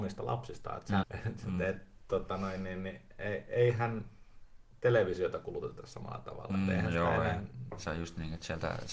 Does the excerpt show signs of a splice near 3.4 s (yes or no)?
no